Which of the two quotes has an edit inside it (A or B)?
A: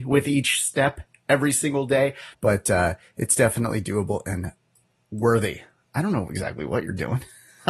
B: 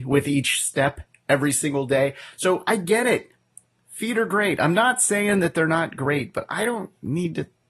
A